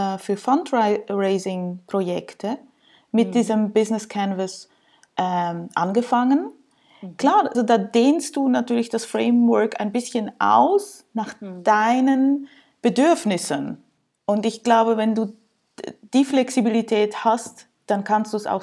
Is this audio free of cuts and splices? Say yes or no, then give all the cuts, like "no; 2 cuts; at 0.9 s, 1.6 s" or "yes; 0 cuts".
no; 1 cut; at 7.5 s